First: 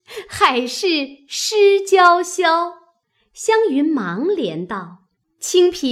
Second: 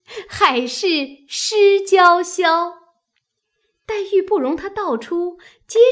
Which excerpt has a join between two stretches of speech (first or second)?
first